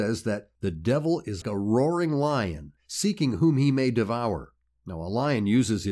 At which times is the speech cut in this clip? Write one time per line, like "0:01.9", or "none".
0:01.4